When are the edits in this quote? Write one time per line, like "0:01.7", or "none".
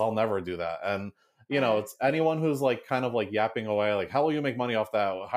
none